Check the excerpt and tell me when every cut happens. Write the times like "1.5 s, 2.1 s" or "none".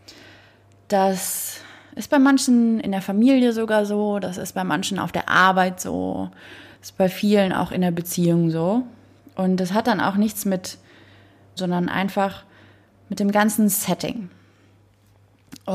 11.6 s